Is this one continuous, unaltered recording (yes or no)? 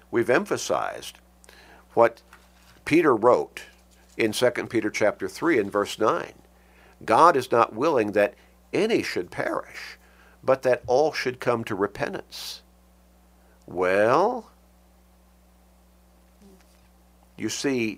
yes